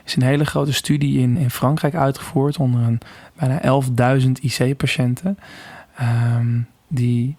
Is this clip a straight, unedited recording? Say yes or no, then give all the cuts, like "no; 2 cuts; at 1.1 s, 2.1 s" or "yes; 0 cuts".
no; 1 cut; at 1.4 s